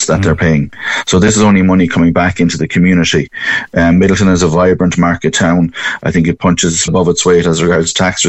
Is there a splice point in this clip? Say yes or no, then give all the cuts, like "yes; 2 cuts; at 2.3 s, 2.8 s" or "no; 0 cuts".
yes; 1 cut; at 6.9 s